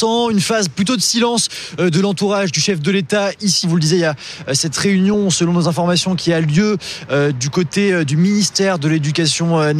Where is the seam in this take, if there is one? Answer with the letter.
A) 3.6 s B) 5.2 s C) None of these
A